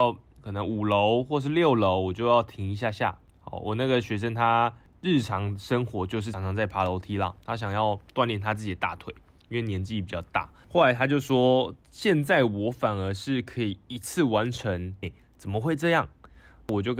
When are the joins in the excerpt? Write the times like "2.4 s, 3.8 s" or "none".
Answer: 6.3 s, 15.0 s